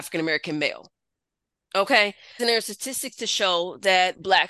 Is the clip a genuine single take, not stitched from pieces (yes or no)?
no